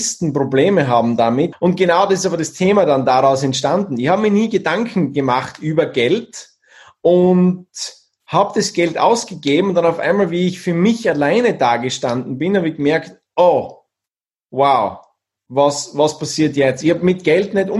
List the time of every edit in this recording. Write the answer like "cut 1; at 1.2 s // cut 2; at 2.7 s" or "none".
cut 1; at 1.5 s